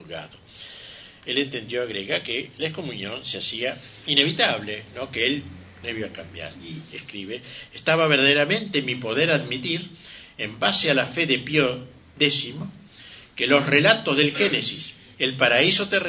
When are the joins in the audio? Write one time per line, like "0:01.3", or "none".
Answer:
none